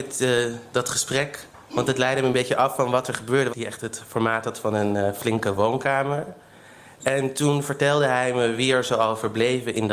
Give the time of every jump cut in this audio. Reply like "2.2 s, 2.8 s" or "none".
3.5 s